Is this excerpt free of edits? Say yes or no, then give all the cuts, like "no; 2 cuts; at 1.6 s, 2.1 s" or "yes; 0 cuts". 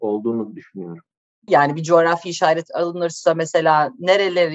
no; 1 cut; at 1.5 s